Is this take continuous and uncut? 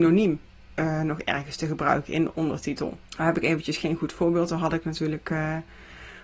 no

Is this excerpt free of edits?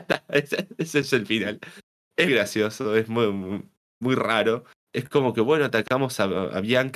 no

